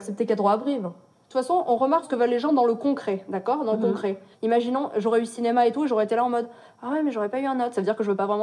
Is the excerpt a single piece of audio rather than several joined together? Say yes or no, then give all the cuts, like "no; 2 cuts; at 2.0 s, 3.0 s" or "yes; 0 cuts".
no; 2 cuts; at 2.0 s, 4.3 s